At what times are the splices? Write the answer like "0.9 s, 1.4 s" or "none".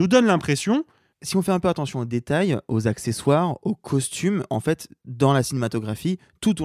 1.1 s